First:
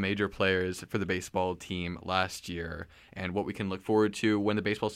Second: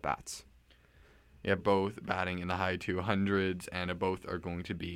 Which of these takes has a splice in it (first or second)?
second